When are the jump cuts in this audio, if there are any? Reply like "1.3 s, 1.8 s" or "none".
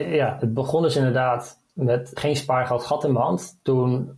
2.2 s